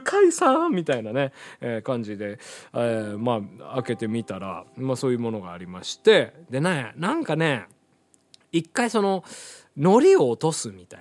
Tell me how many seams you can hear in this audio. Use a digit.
0